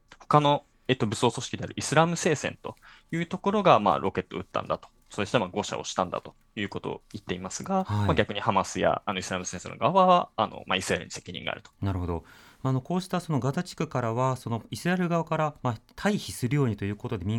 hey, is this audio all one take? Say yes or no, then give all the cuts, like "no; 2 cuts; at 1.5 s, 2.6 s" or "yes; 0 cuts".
no; 1 cut; at 11.7 s